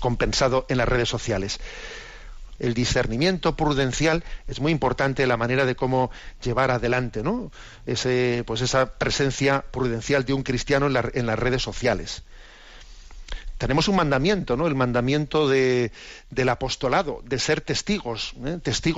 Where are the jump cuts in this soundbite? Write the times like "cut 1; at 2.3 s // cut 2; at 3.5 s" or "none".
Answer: cut 1; at 2.6 s